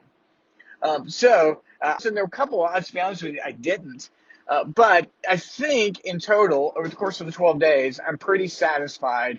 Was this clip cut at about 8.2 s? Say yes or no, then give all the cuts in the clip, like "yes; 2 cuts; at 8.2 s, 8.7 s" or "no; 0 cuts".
no; 1 cut; at 2.0 s